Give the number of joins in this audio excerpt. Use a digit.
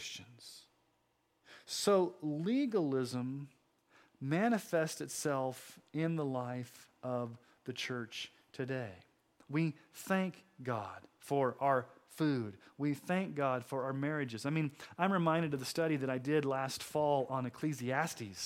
1